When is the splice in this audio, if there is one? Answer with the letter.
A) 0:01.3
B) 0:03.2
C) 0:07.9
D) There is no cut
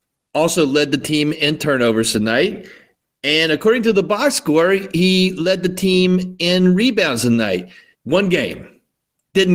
C